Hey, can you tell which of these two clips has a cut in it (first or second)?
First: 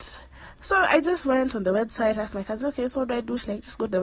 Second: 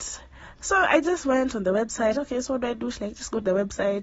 second